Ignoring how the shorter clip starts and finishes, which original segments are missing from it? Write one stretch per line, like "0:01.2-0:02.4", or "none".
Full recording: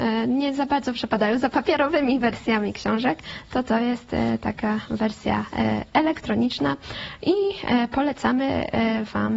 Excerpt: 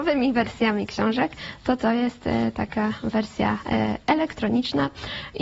none

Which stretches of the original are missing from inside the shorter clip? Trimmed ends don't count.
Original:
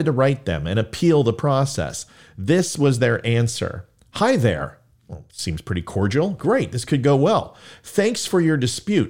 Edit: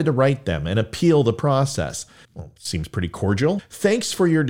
0:02.2-0:05.0
0:06.3-0:07.7

